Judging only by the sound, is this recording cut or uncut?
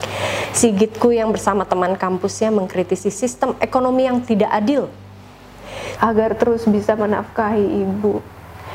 cut